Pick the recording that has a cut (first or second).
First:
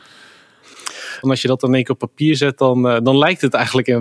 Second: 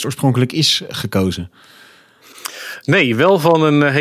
first